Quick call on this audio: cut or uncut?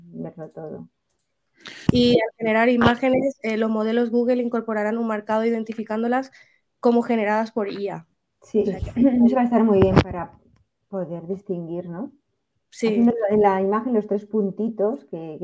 cut